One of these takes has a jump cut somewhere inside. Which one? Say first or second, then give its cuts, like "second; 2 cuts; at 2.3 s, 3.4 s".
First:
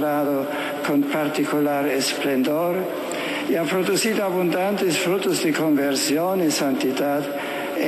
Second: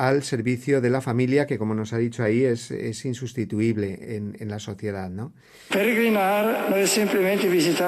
second; 2 cuts; at 4.0 s, 5.7 s